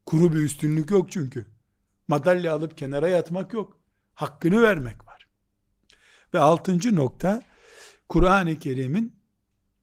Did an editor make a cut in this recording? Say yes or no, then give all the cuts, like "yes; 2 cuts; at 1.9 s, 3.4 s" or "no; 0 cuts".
no; 0 cuts